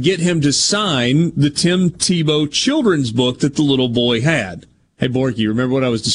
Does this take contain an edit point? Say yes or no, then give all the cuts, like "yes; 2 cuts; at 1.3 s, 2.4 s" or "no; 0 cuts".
yes; 1 cut; at 4.9 s